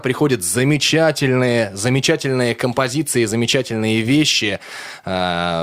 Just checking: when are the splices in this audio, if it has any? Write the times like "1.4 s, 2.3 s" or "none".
none